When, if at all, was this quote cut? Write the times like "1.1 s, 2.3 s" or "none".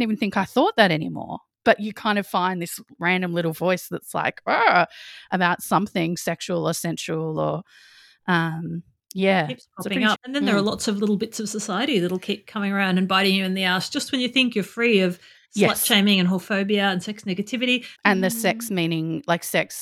10.2 s, 18.0 s